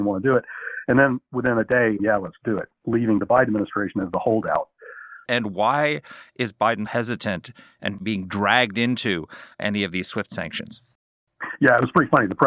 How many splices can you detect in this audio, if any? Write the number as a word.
three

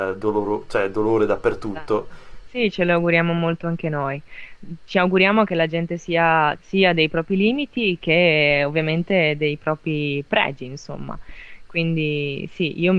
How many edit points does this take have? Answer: two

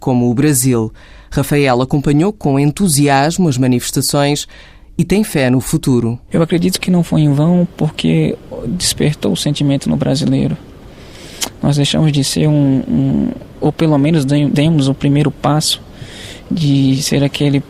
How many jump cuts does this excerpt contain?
zero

